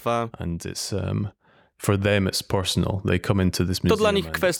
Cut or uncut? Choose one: uncut